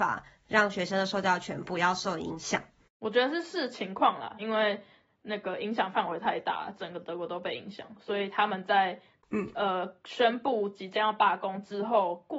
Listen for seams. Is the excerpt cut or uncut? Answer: cut